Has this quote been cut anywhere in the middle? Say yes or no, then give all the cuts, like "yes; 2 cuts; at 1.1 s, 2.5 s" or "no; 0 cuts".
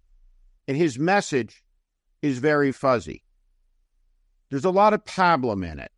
yes; 1 cut; at 2.7 s